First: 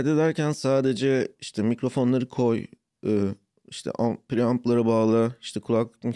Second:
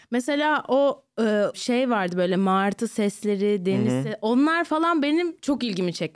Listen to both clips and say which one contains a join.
second; 1 cut; at 1.5 s

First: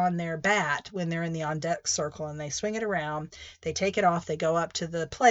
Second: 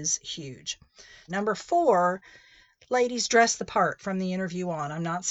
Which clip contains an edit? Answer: second; 1 cut; at 1.3 s

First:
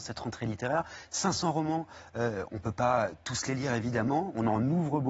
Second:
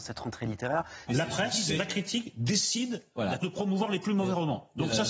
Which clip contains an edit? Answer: second; 2 cuts; at 1.1 s, 3.4 s

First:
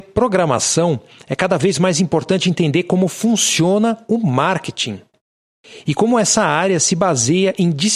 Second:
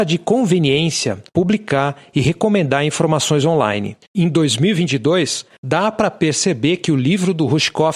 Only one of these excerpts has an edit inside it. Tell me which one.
second; 3 cuts; at 1.3 s, 4.1 s, 5.6 s

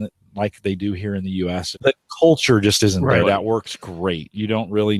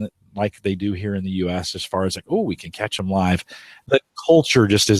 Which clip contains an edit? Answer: first; 2 cuts; at 1.7 s, 3.2 s

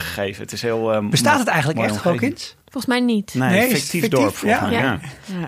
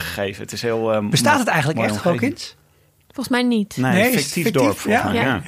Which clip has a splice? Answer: first; 1 cut; at 2.6 s

